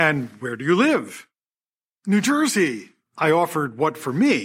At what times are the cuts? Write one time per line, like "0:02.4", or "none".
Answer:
0:03.0